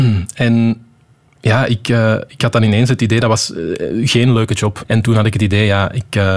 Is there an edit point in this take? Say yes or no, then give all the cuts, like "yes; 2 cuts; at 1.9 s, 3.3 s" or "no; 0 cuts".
yes; 1 cut; at 4.8 s